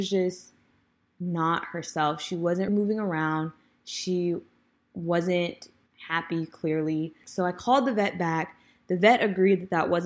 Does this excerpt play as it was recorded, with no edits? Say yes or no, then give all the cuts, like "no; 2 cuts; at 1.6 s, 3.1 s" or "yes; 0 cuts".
no; 3 cuts; at 2.7 s, 5.9 s, 7.2 s